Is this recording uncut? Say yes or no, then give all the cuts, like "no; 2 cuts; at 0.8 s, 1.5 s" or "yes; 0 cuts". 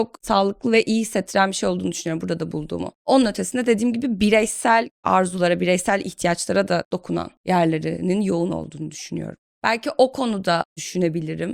no; 2 cuts; at 2.9 s, 9.5 s